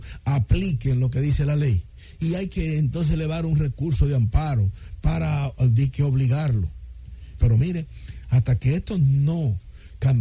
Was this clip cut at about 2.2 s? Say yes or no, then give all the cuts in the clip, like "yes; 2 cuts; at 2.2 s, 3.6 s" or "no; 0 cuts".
no; 1 cut; at 7.4 s